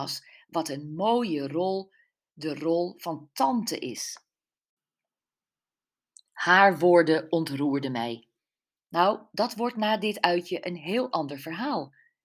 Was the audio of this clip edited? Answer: yes; 1 cut; at 8.8 s

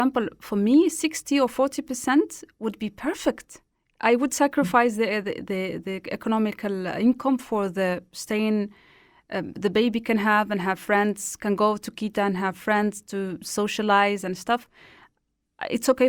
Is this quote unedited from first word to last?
yes; 0 cuts

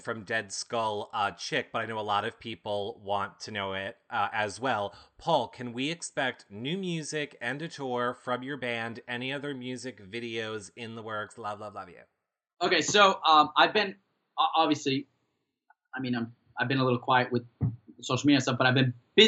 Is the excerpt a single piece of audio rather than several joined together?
yes; 0 cuts

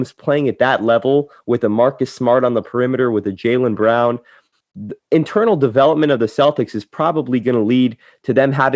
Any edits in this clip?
no; 0 cuts

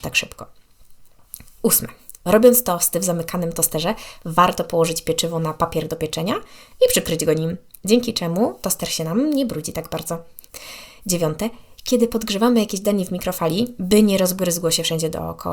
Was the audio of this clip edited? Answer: no; 0 cuts

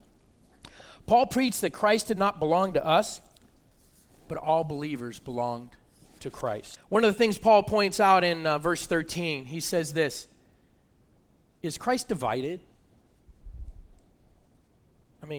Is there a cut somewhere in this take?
yes; 1 cut; at 6.8 s

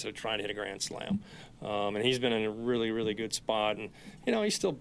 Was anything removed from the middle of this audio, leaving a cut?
no; 0 cuts

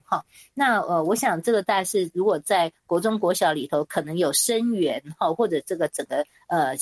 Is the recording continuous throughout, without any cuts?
yes; 0 cuts

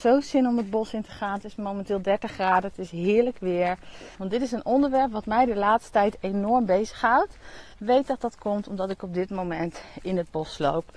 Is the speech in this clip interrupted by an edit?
yes; 2 cuts; at 4.1 s, 7.7 s

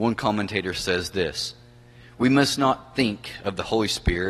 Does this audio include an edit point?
no; 0 cuts

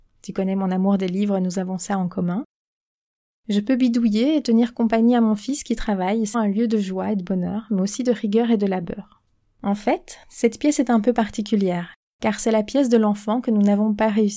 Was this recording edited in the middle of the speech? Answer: yes; 1 cut; at 6.3 s

